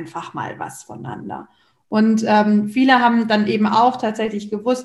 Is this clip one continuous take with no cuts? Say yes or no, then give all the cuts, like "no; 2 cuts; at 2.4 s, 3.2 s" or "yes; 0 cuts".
yes; 0 cuts